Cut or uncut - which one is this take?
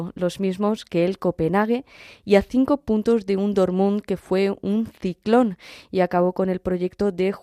uncut